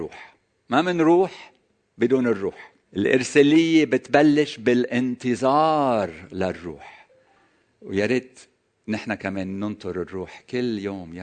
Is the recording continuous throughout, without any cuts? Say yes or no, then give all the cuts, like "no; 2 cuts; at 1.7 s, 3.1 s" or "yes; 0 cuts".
no; 1 cut; at 2.8 s